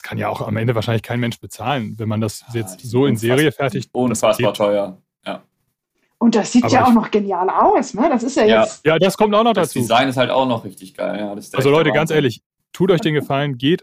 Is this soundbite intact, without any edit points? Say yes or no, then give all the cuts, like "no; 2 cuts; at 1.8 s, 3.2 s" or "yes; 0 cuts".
yes; 0 cuts